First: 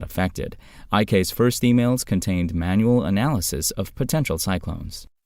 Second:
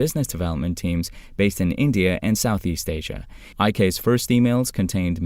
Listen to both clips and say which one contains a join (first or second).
second